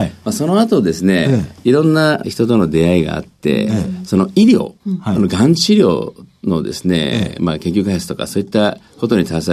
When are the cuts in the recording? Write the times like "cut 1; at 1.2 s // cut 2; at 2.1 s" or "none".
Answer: cut 1; at 2.2 s // cut 2; at 4.8 s